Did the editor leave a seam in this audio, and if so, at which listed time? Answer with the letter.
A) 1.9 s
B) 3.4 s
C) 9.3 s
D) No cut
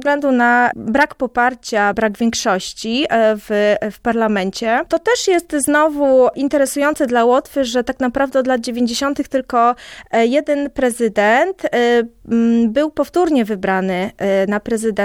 A